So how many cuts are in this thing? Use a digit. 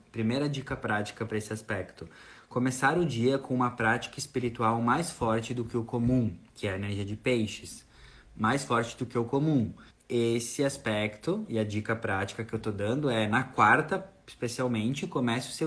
2